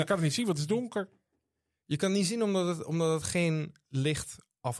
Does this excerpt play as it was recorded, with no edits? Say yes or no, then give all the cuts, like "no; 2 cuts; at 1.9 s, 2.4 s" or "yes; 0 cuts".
yes; 0 cuts